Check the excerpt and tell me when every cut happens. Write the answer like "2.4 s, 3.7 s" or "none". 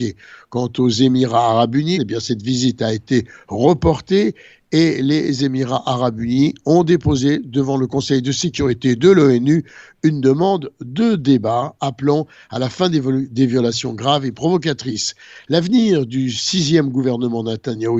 1.9 s